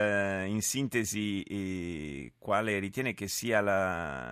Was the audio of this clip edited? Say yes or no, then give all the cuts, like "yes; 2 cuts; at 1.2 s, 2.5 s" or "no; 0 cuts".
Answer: no; 0 cuts